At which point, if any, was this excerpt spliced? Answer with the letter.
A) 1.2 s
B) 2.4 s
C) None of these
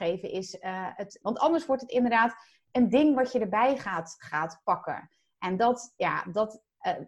A